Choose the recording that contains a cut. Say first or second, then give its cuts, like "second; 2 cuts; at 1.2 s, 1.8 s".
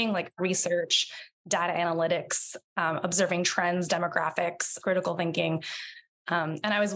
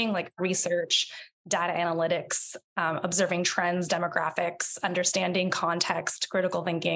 first; 1 cut; at 4.8 s